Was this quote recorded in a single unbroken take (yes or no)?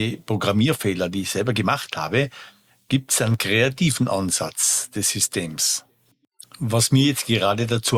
no